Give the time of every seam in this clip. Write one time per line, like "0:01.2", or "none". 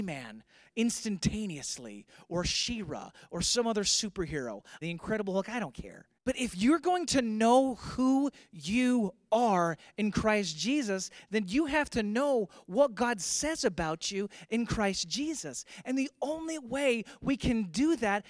0:04.8
0:06.2

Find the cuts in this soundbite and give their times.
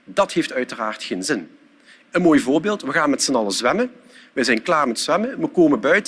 0:02.0

